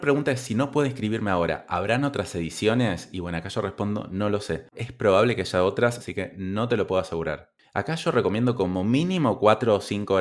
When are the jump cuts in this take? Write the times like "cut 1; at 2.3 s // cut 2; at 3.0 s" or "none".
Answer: cut 1; at 4.7 s // cut 2; at 6.0 s // cut 3; at 7.6 s